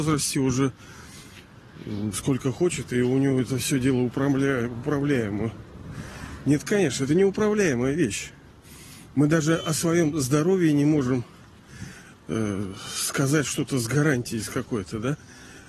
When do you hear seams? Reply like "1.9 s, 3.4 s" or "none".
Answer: 2.1 s